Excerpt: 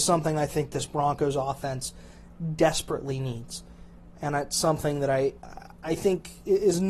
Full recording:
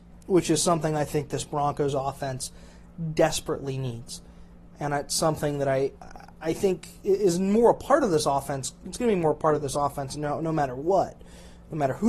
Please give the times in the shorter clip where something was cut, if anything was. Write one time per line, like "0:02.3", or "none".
none